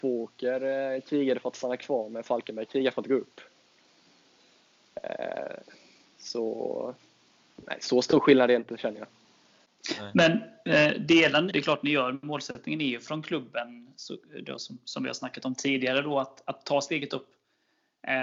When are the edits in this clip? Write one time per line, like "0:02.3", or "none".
0:11.5